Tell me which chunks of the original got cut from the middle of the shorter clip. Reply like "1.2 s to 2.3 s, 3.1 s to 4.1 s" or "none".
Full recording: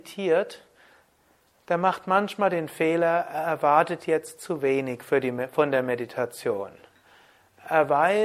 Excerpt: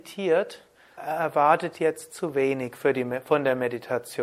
1.0 s to 3.2 s